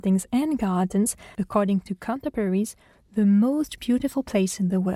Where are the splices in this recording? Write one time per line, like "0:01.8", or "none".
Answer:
0:01.4